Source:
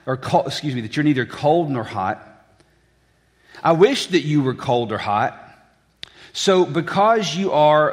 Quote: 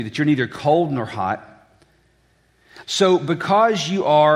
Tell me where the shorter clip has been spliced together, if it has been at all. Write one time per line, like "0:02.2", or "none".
0:02.8